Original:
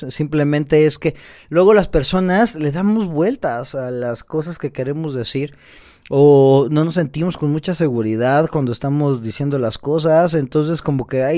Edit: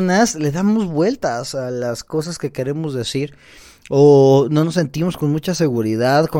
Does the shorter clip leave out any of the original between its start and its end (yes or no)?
no